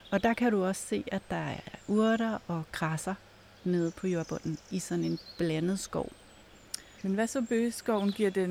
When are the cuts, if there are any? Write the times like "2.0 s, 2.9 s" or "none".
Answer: 7.0 s